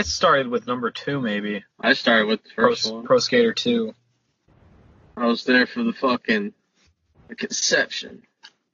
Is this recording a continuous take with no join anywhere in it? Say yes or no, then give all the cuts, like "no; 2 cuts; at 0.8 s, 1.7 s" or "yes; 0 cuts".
yes; 0 cuts